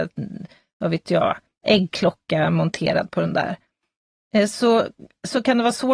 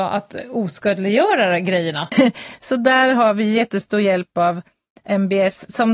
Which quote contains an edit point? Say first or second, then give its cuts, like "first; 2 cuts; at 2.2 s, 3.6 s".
second; 1 cut; at 2.1 s